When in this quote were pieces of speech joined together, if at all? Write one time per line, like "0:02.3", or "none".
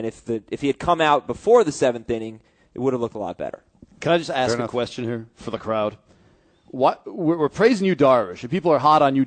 none